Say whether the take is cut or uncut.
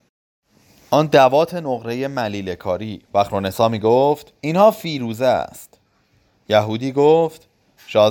cut